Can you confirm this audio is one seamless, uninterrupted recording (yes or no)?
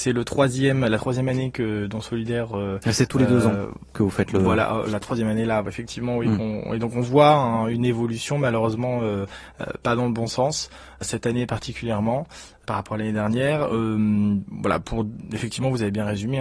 yes